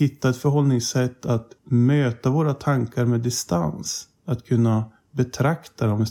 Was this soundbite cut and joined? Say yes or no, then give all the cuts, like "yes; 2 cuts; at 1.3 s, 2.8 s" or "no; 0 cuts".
yes; 1 cut; at 1.6 s